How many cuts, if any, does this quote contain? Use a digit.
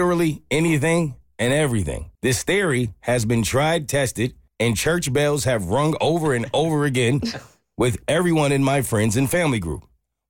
2